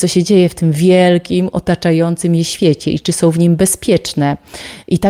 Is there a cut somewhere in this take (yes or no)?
no